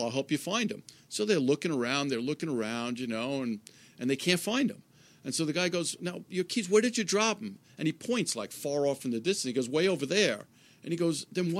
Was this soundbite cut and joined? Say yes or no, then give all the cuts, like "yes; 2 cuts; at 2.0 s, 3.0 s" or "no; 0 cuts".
no; 0 cuts